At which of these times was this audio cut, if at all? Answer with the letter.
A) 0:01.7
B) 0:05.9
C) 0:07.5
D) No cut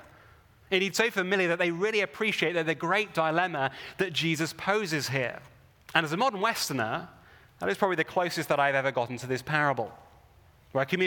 B